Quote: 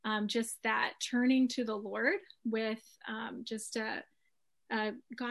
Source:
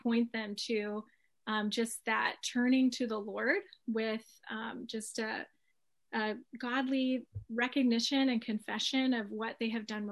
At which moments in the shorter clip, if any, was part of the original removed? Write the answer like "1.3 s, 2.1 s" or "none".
none